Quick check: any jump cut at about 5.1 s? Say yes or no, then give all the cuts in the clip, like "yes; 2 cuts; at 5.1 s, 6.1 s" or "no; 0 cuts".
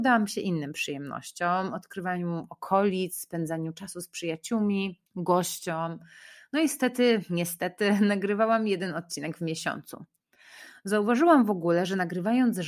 yes; 1 cut; at 5.1 s